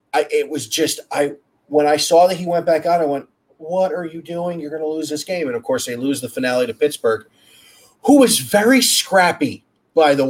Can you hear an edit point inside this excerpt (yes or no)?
no